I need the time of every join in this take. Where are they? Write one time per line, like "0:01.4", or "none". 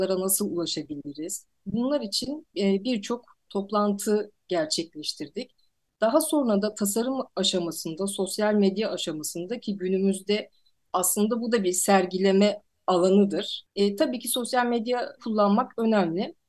0:13.7